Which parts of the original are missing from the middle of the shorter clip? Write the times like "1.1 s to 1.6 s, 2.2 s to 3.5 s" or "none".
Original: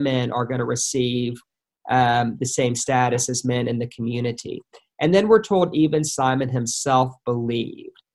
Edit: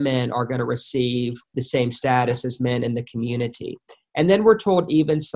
1.5 s to 2.4 s

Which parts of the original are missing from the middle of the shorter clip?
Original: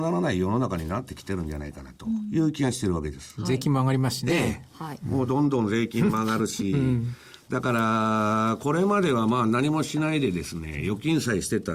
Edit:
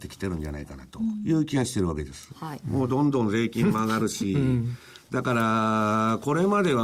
3.4 s to 4.7 s

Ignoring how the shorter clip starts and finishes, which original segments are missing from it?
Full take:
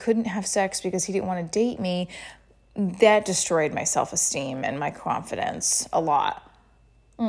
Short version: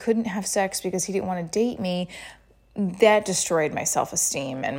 none

